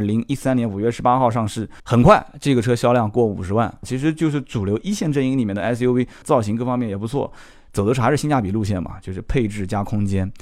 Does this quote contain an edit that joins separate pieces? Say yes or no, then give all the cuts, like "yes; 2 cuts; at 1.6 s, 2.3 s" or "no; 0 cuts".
yes; 3 cuts; at 1.8 s, 3.8 s, 6.2 s